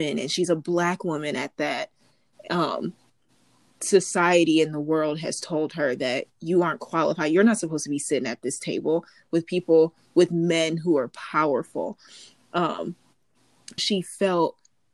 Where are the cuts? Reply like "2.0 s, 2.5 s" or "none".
13.8 s

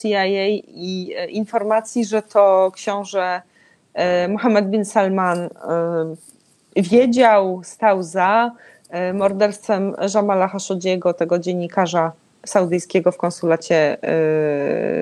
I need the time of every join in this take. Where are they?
none

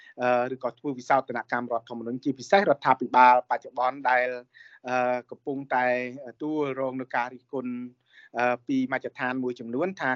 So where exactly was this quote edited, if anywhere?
6.4 s

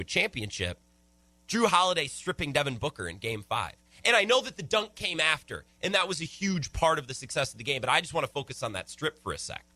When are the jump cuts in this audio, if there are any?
none

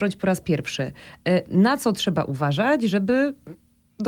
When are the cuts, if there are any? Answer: none

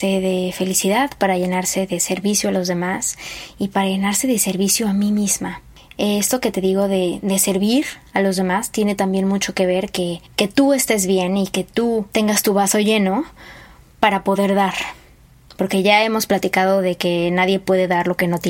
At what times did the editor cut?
none

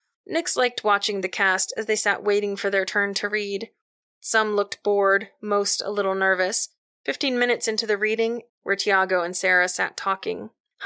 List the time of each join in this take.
6.9 s, 8.5 s

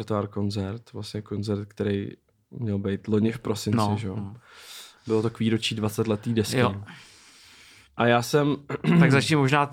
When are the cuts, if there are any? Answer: none

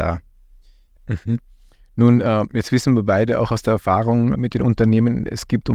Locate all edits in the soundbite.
1.0 s, 4.3 s

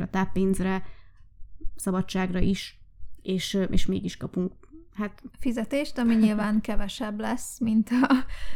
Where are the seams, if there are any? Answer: 5.3 s

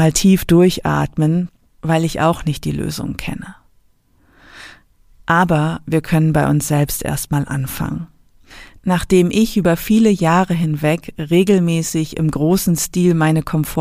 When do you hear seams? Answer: none

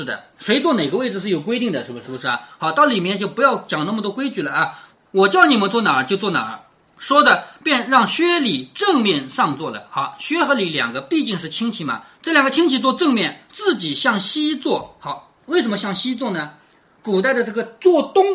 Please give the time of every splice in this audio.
2.0 s

